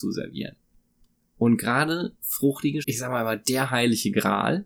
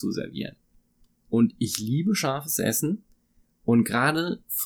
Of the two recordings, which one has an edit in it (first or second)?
first